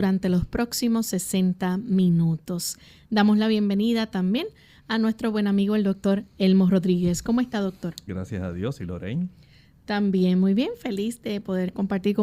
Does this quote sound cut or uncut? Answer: cut